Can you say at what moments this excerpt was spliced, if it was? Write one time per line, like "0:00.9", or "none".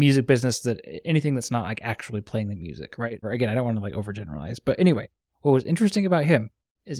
0:03.2